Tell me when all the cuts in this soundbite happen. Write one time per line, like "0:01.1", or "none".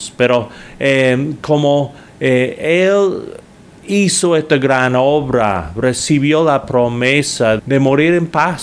0:07.6